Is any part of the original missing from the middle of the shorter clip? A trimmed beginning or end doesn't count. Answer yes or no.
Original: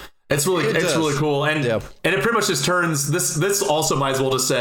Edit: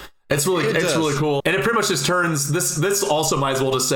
yes